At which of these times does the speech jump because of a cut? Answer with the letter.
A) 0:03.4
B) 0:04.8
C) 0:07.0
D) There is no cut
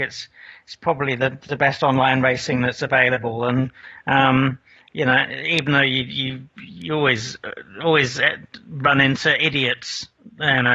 D